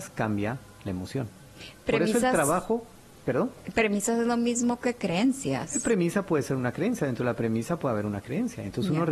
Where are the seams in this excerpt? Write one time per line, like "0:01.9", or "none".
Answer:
none